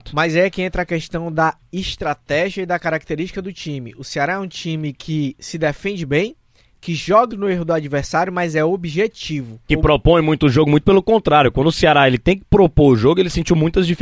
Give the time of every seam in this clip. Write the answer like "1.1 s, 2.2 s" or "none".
7.3 s, 9.7 s